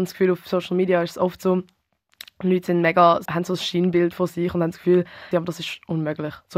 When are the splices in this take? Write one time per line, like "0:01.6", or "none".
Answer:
0:03.3
0:05.3

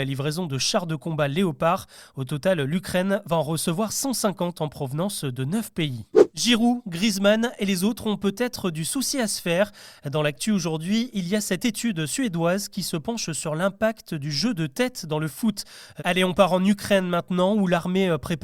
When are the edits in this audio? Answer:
0:16.0

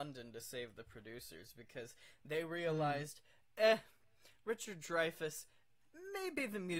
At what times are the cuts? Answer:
none

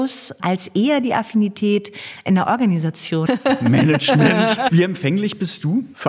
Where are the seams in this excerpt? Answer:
0:03.3
0:04.7

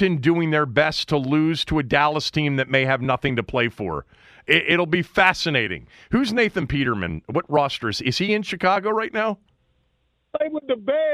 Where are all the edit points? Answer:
none

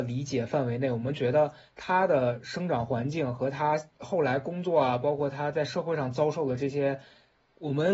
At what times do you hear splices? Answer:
none

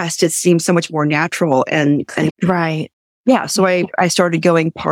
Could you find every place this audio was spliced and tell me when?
0:02.3

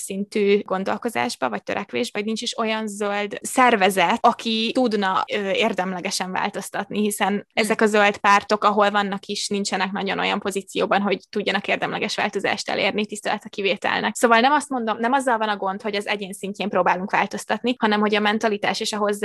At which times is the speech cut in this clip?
0:02.1

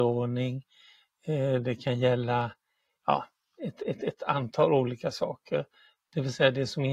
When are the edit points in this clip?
none

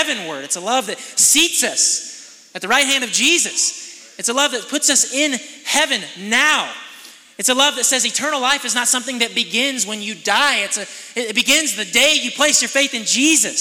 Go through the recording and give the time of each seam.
none

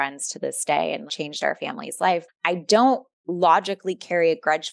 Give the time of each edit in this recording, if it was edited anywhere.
0:01.1
0:02.3

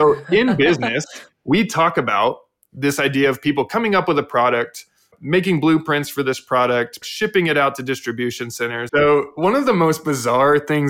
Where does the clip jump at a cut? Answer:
0:07.0
0:08.9

